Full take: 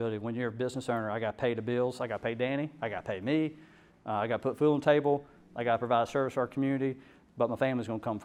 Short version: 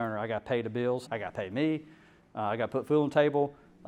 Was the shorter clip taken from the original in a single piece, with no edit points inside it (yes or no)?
no